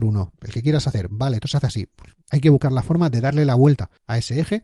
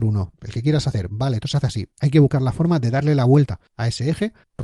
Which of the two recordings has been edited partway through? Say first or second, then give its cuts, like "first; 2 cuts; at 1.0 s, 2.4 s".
second; 1 cut; at 1.9 s